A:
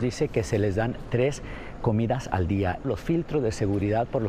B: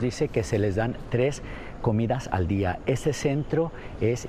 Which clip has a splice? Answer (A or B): A